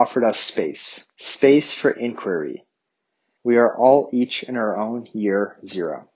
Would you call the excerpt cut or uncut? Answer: cut